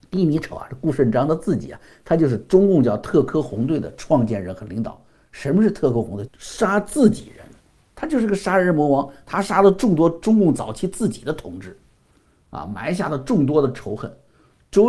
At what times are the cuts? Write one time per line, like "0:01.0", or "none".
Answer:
0:06.3

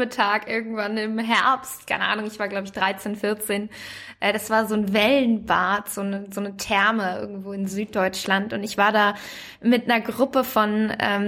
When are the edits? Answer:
none

